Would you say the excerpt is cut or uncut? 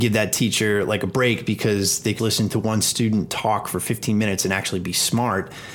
cut